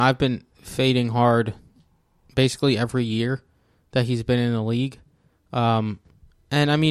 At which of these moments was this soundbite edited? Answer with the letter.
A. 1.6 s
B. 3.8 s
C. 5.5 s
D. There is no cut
D